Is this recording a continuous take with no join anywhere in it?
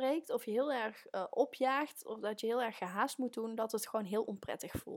yes; 0 cuts

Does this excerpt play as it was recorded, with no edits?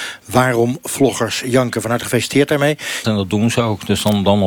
no; 1 cut; at 3.0 s

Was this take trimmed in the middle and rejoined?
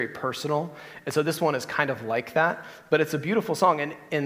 no; 0 cuts

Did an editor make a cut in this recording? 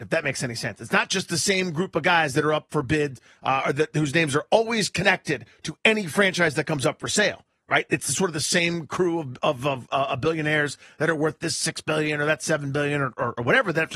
no; 0 cuts

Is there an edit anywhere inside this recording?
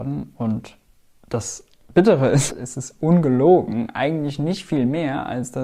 yes; 1 cut; at 2.5 s

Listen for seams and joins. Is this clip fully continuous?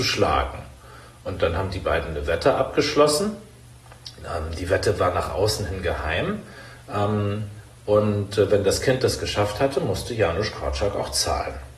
yes; 0 cuts

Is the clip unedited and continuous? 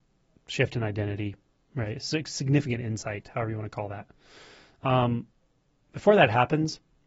yes; 0 cuts

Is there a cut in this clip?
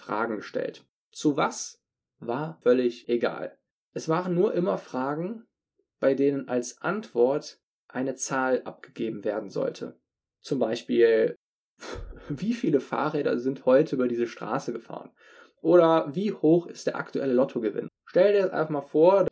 yes; 1 cut; at 17.9 s

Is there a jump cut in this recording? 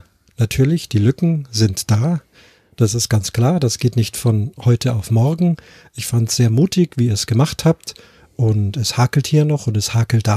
no; 0 cuts

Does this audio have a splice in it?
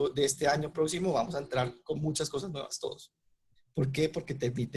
yes; 1 cut; at 3.6 s

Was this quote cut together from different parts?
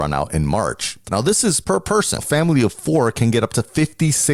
yes; 2 cuts; at 1.0 s, 2.2 s

